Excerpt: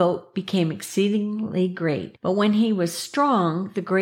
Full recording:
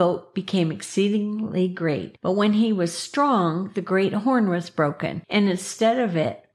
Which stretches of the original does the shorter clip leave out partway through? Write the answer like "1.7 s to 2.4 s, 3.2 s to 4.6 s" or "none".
none